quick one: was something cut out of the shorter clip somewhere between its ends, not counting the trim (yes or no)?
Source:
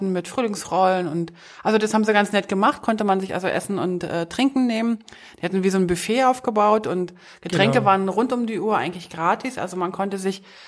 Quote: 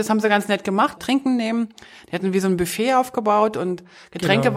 yes